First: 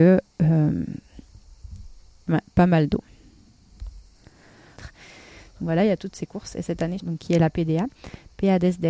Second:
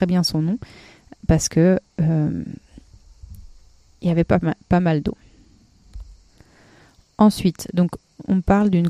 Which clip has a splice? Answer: first; 3 cuts; at 2.3 s, 4.8 s, 7.0 s

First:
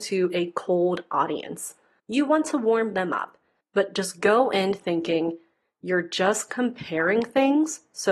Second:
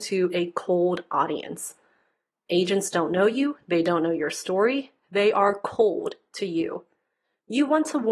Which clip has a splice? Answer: first; 2 cuts; at 2.0 s, 3.6 s

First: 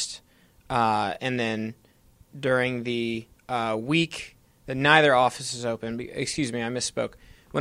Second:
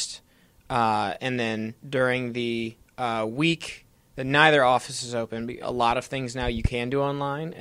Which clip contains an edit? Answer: second; 2 cuts; at 1.8 s, 5.6 s

